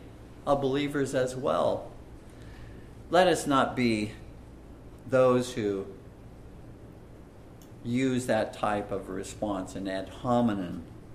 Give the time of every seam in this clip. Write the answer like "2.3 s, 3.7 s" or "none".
3.0 s, 5.0 s